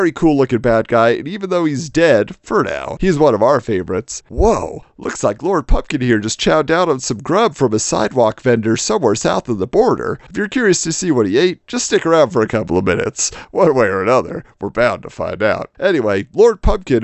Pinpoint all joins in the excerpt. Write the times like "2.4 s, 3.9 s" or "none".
4.2 s